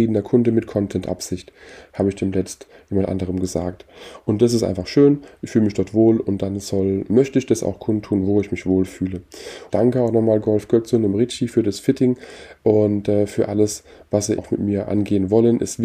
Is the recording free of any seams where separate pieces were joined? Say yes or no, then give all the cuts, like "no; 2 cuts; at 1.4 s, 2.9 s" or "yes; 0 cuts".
no; 2 cuts; at 9.7 s, 14.4 s